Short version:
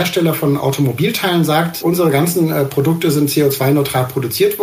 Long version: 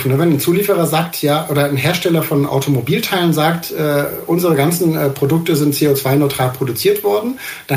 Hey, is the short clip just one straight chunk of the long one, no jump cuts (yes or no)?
no